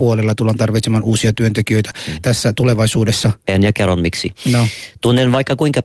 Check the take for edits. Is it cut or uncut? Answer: cut